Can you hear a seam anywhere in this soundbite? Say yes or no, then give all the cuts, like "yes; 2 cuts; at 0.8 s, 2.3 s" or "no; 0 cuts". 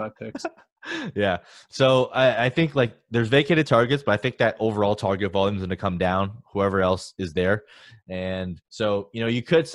yes; 1 cut; at 8.7 s